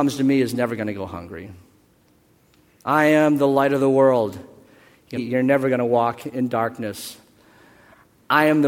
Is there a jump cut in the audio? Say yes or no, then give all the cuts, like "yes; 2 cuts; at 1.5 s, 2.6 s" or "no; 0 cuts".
yes; 1 cut; at 5.2 s